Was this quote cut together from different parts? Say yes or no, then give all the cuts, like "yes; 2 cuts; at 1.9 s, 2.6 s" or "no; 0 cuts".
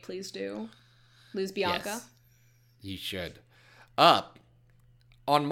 no; 0 cuts